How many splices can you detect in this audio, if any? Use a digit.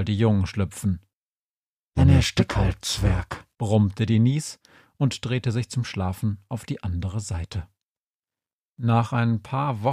1